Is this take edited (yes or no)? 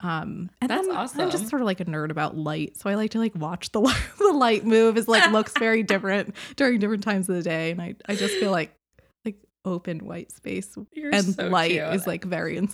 yes